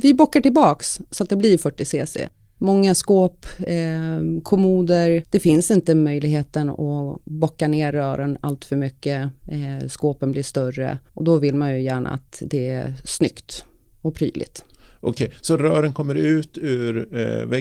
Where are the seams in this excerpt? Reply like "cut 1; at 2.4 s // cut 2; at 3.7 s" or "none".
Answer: cut 1; at 11.1 s